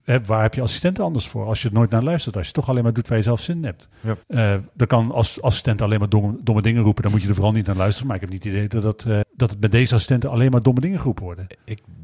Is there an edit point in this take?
yes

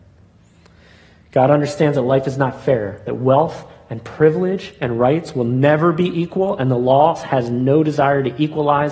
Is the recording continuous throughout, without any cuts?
yes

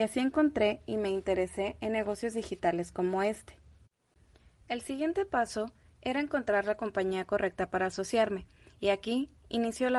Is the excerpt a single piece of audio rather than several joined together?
yes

